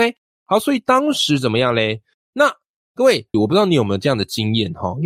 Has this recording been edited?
yes; 2 cuts; at 2.1 s, 3.3 s

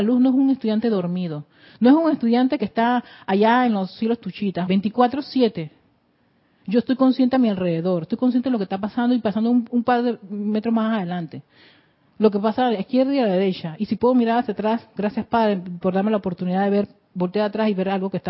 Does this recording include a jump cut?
yes; 1 cut; at 4.7 s

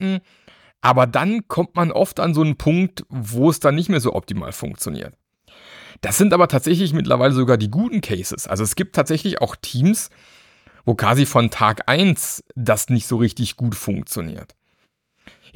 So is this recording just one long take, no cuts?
yes; 0 cuts

